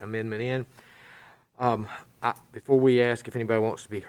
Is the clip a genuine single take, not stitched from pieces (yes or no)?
yes